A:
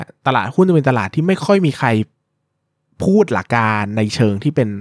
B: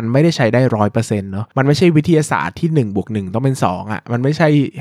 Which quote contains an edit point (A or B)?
A